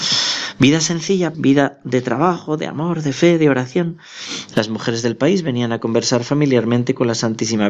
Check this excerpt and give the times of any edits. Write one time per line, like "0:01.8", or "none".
0:01.3
0:04.5